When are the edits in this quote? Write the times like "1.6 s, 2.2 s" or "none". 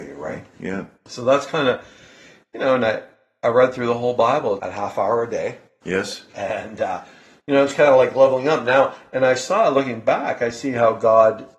4.6 s